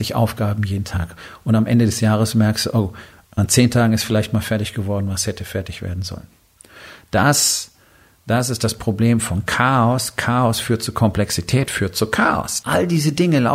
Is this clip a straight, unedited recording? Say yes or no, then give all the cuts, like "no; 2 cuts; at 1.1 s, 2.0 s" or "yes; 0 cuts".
no; 3 cuts; at 3.2 s, 10.9 s, 12.6 s